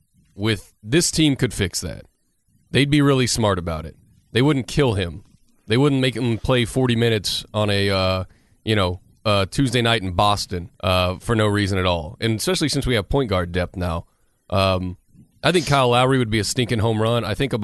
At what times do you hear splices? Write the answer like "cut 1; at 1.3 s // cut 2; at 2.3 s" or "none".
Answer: cut 1; at 10.7 s